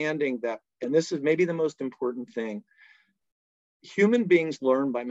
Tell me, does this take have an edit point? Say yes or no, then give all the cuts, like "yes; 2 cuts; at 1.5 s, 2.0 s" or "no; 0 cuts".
no; 0 cuts